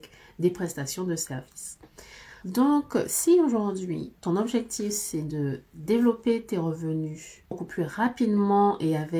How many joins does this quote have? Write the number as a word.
one